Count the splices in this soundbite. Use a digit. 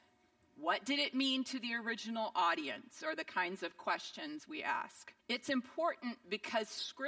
1